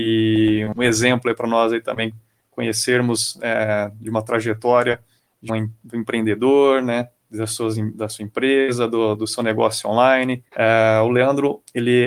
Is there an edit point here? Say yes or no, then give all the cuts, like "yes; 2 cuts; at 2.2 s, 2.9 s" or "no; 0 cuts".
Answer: yes; 2 cuts; at 5.5 s, 10.5 s